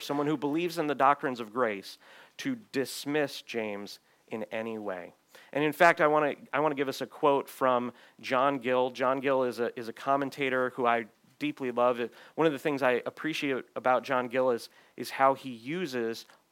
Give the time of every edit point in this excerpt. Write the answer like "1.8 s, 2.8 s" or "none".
none